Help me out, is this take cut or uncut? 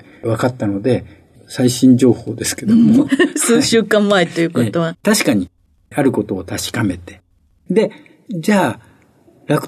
cut